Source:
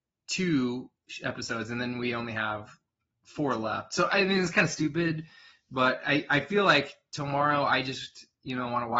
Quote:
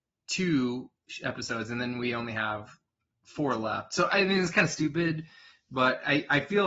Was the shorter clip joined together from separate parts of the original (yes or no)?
no